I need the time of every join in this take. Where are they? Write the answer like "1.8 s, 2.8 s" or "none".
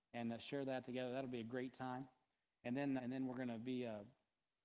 3.0 s